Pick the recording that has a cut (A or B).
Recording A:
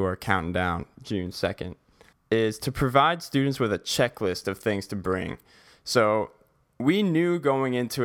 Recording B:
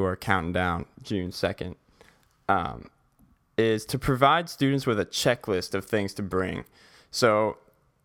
A